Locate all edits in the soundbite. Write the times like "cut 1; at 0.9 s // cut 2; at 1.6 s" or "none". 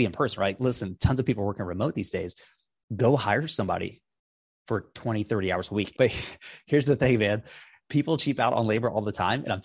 cut 1; at 5.9 s

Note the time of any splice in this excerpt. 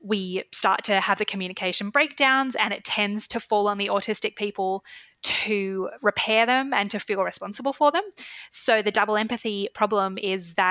none

